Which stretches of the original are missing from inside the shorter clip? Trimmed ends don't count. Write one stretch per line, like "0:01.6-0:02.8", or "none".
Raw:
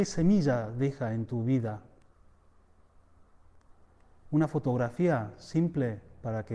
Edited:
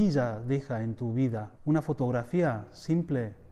0:01.9-0:04.2